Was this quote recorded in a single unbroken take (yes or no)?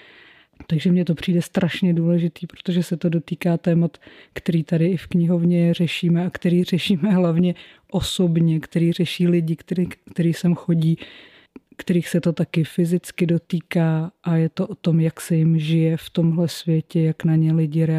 yes